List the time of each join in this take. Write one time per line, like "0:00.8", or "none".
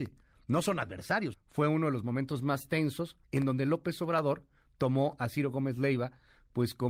0:01.3
0:03.2